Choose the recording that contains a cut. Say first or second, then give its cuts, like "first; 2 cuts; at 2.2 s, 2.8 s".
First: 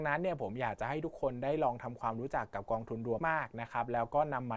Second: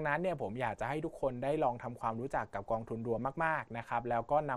first; 1 cut; at 3.2 s